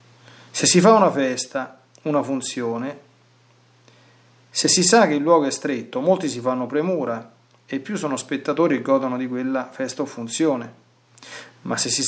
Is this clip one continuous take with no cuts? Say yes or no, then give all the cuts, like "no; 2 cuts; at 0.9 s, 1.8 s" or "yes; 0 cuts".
yes; 0 cuts